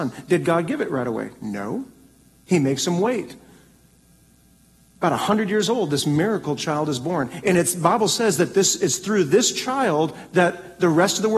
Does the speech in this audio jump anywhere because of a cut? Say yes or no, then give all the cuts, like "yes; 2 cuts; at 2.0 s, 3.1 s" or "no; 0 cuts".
no; 0 cuts